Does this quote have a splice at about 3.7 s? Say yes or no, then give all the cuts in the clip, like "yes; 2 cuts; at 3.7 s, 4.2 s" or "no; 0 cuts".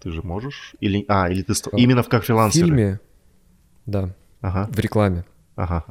no; 1 cut; at 1.7 s